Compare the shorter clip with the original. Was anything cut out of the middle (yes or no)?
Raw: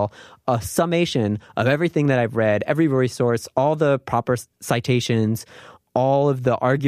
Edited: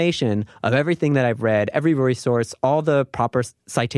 no